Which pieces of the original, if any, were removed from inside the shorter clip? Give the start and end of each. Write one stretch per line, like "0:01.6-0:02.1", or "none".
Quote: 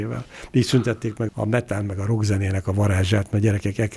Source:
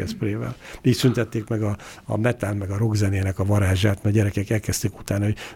0:01.6-0:02.0